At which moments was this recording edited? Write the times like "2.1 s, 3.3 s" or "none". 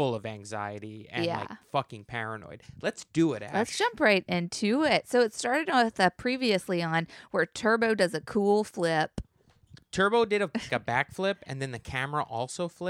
10.7 s